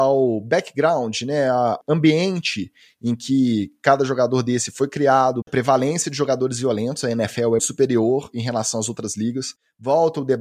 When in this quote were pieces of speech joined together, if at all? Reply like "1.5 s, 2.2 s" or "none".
5.5 s, 7.6 s